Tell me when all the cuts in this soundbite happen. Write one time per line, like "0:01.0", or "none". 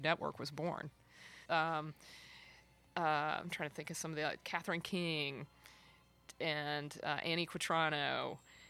0:01.5